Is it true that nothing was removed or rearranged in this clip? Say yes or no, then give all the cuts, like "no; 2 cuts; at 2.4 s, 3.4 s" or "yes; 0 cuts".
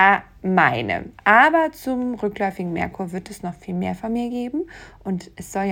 yes; 0 cuts